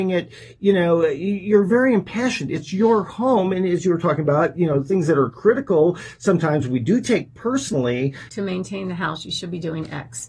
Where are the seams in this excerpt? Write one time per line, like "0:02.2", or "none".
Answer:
0:08.3